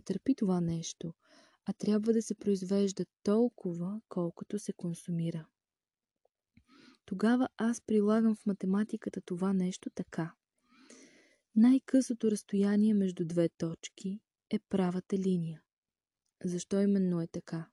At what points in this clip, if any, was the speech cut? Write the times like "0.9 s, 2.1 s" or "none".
none

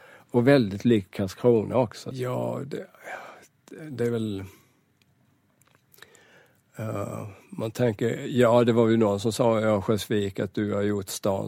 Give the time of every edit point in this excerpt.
2.1 s

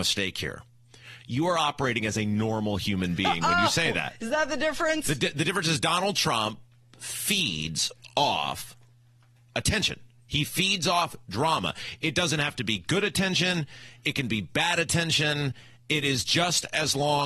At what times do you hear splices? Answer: none

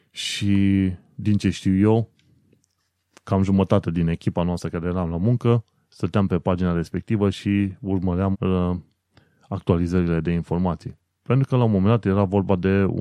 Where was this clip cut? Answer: 8.3 s

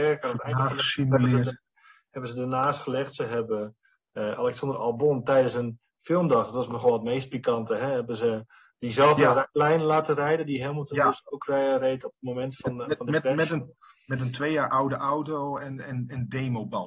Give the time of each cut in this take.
none

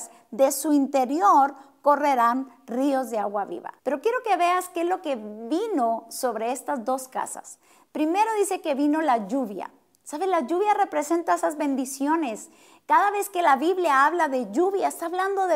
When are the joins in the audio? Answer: 3.8 s

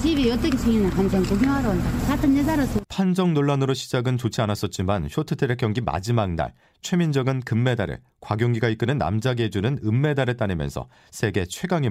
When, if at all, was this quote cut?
2.8 s

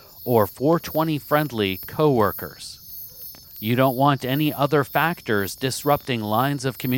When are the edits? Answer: 3.4 s

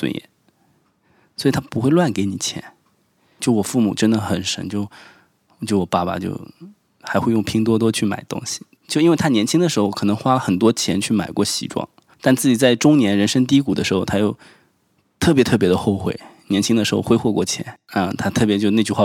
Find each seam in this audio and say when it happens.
8.8 s

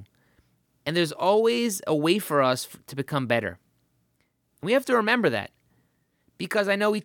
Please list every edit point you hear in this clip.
none

